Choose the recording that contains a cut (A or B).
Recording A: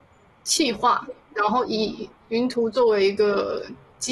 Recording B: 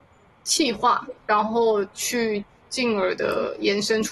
B